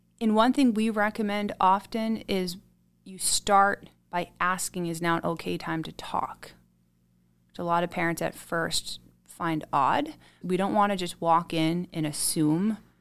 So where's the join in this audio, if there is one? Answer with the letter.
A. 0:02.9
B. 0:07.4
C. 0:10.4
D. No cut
C